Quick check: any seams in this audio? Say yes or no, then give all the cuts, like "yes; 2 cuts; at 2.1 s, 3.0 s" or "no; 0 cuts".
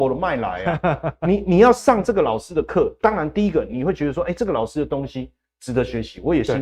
no; 0 cuts